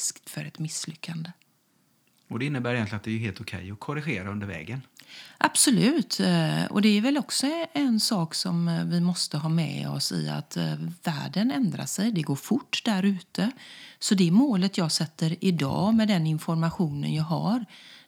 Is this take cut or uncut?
uncut